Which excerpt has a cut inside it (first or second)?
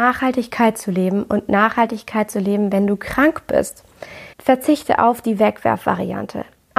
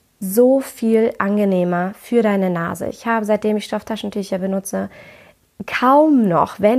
first